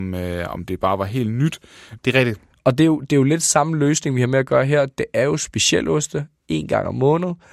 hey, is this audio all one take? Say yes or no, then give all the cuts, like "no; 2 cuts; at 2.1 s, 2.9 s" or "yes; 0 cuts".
no; 1 cut; at 2.0 s